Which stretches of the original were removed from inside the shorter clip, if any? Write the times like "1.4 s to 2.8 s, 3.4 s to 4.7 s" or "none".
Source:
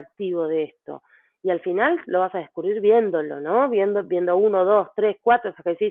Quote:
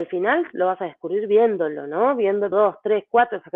4.1 s to 4.6 s

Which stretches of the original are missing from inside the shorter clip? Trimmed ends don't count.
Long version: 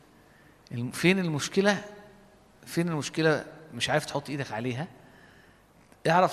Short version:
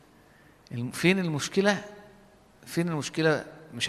none

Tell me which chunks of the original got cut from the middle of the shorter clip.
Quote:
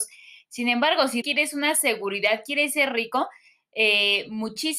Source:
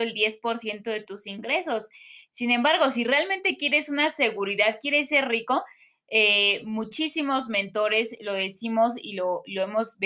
3.0 s to 3.6 s

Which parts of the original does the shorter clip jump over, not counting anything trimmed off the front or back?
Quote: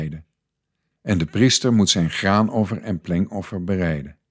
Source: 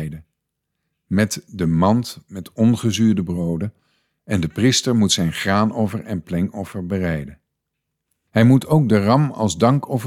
0.9 s to 4.1 s

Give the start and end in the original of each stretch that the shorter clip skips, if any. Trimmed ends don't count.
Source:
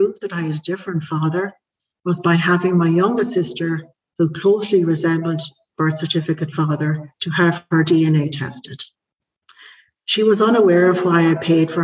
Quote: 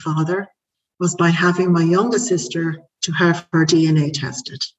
4.0 s to 7.2 s

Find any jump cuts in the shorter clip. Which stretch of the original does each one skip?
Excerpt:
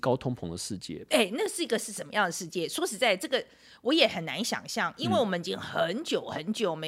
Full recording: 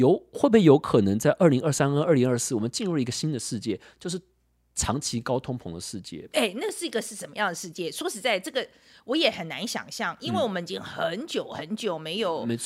none

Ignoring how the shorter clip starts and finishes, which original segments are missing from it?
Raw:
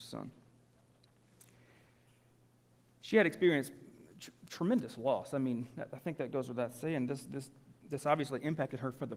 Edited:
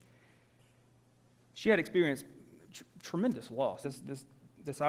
5.3 s to 7.1 s

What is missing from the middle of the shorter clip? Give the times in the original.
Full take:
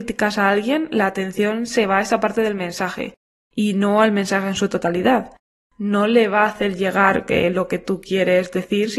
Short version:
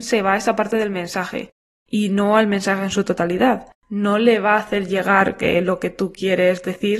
5.4 s to 5.7 s

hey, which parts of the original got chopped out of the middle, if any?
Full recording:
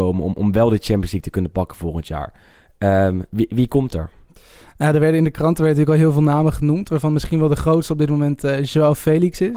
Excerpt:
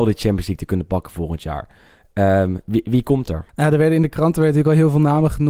4.1 s to 4.7 s

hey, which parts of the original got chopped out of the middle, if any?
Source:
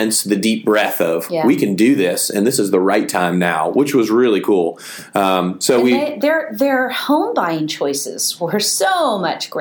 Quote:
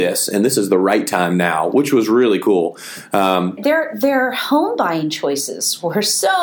5.6 s to 6.1 s

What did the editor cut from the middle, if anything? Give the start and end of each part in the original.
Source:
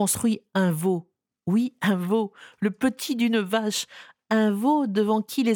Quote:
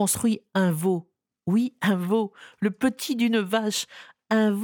none

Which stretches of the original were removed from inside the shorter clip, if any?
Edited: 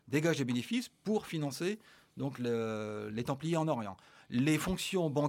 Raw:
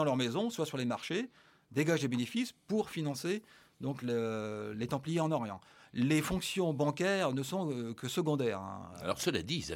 none

